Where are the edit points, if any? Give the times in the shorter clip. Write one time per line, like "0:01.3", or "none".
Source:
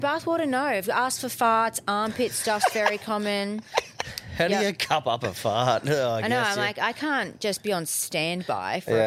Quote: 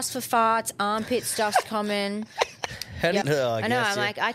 0:01.6
0:03.2